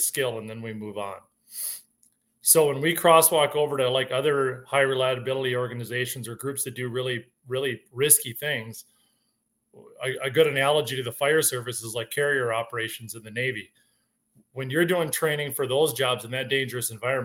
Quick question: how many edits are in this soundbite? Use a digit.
0